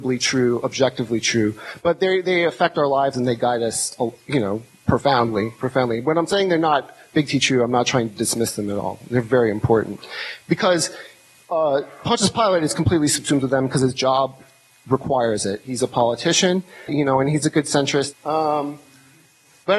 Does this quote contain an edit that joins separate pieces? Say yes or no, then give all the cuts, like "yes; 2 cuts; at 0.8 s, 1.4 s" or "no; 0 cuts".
yes; 2 cuts; at 16.9 s, 18.1 s